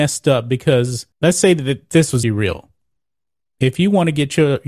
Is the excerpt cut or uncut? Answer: cut